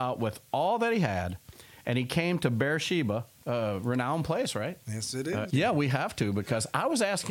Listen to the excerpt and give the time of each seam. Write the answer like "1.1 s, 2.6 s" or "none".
3.3 s, 5.5 s